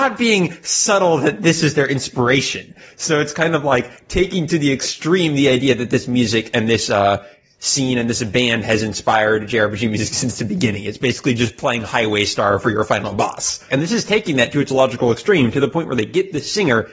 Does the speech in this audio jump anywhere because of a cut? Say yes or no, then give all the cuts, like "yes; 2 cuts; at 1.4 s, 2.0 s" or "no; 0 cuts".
yes; 1 cut; at 13.7 s